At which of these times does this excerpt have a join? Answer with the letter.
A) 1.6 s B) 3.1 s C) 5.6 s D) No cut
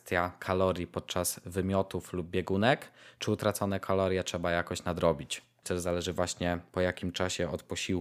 C